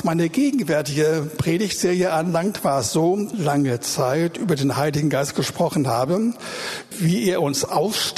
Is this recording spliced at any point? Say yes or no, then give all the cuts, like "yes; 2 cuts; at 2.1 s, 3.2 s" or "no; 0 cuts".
yes; 2 cuts; at 3.3 s, 6.9 s